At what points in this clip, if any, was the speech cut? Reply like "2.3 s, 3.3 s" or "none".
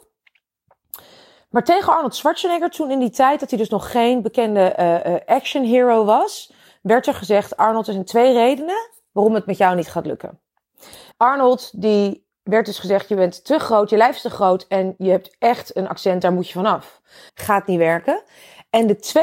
11.1 s, 17.3 s